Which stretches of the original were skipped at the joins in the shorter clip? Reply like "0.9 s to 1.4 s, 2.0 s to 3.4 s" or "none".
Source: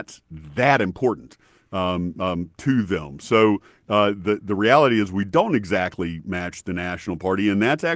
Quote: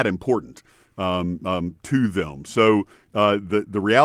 none